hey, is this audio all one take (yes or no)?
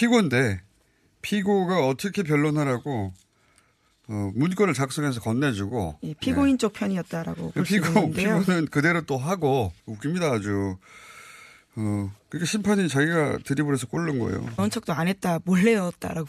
no